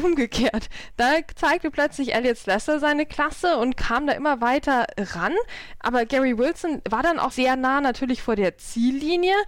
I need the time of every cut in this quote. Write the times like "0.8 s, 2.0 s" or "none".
7.3 s

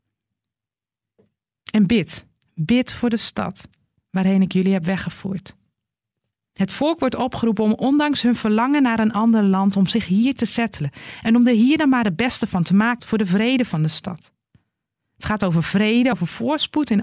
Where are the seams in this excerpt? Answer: 13.0 s, 16.1 s

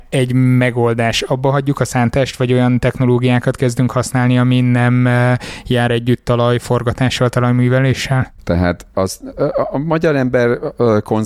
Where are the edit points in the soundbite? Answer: 8.4 s

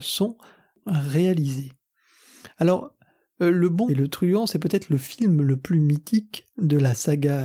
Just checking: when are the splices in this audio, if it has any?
3.9 s

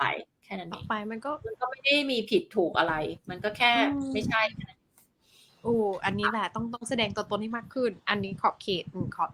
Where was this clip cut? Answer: none

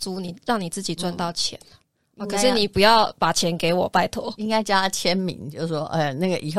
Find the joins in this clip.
none

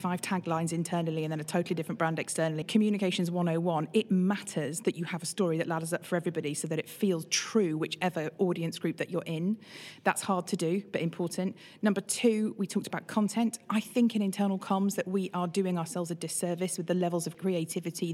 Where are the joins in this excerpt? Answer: 2.6 s

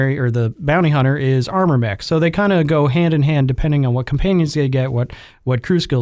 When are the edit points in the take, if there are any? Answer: none

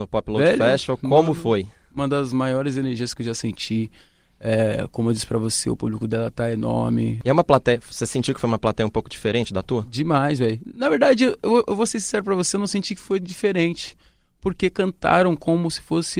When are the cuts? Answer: none

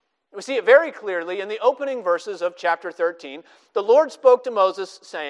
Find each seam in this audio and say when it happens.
none

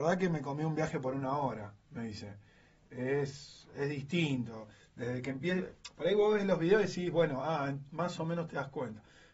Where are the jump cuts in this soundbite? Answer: none

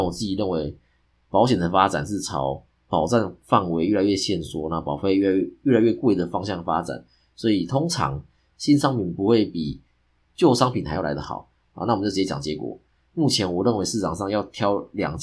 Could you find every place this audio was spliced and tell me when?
none

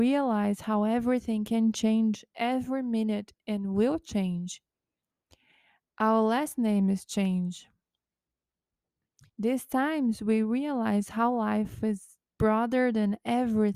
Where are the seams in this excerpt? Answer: 9.3 s

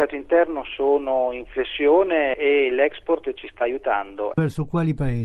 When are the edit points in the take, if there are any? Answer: 4.3 s

